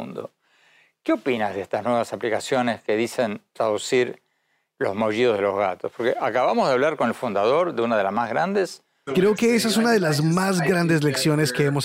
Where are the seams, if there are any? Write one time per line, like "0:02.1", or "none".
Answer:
0:09.1